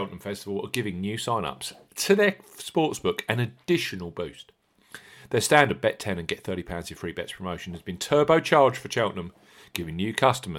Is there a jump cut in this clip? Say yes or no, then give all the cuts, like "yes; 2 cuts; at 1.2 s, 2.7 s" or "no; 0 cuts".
no; 0 cuts